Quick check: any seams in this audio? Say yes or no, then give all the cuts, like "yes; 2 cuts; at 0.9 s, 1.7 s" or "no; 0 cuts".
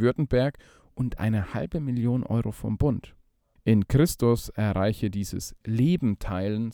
yes; 1 cut; at 3.6 s